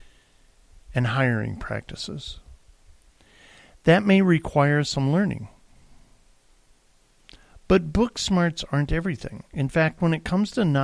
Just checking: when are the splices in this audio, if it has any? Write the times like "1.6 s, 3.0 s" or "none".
none